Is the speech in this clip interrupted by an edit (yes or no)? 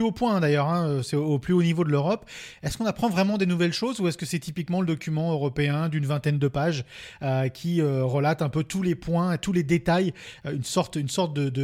no